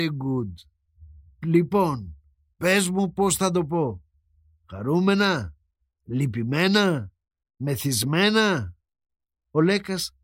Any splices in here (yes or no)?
no